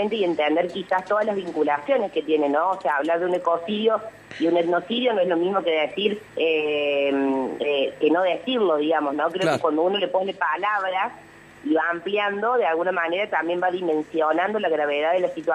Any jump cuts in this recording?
yes; 1 cut; at 6.3 s

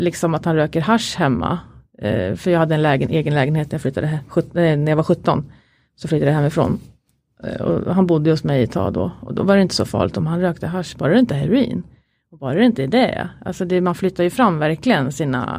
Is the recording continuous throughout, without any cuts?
yes; 0 cuts

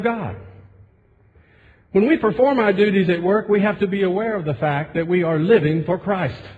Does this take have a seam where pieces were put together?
no; 0 cuts

